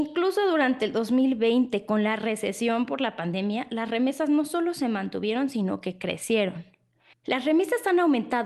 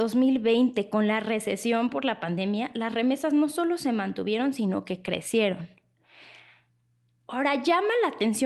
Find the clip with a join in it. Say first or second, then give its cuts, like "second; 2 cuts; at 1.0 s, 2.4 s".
first; 1 cut; at 7.1 s